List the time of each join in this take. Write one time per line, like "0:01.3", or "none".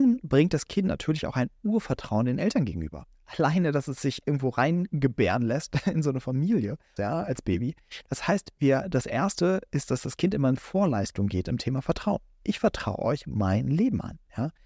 0:07.0